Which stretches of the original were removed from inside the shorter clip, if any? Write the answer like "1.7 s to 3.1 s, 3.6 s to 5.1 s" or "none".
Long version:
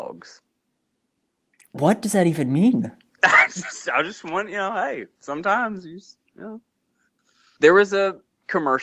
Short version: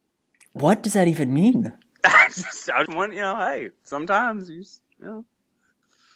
4.0 s to 4.2 s